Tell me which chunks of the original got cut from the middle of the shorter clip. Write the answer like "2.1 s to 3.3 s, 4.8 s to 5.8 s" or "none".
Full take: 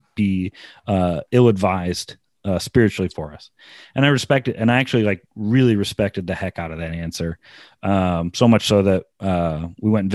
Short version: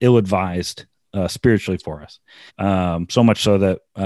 3.8 s to 7.7 s